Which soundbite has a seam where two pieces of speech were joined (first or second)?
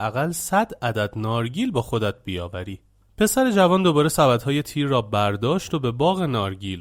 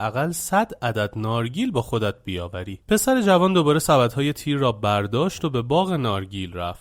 second